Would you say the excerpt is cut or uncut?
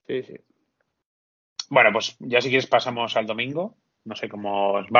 uncut